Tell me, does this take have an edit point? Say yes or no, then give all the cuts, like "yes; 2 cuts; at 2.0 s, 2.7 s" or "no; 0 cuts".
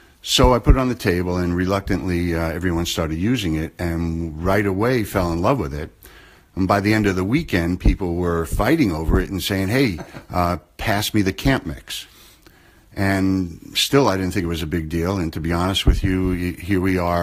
no; 0 cuts